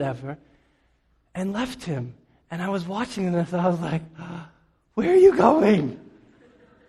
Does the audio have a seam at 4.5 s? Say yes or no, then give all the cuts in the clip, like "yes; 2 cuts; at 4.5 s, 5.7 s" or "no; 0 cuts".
no; 0 cuts